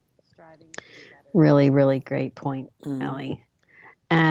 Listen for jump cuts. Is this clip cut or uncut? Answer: uncut